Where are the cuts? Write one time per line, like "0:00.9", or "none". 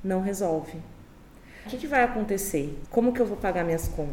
0:01.7
0:02.8